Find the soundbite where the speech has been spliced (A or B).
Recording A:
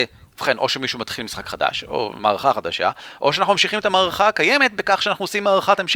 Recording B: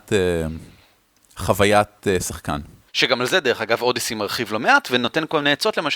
B